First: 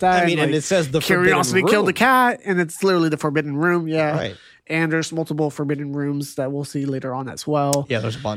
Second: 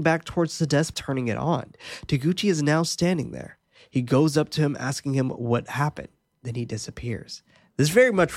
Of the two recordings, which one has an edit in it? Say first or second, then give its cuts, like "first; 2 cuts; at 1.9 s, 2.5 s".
second; 1 cut; at 0.9 s